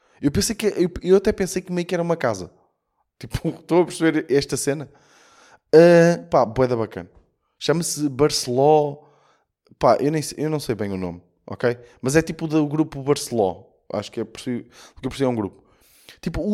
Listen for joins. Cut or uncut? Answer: uncut